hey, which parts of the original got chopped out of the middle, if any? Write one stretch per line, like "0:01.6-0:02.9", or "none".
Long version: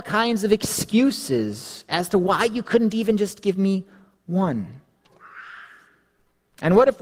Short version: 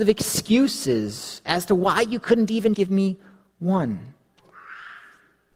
0:03.2-0:03.4